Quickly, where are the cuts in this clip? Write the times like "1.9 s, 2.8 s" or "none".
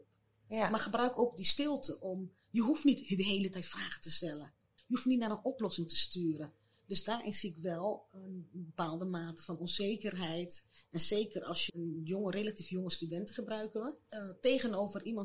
4.8 s, 11.7 s, 14.1 s